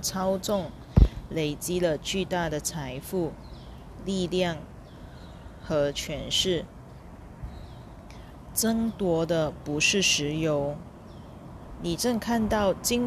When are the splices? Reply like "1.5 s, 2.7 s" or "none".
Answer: none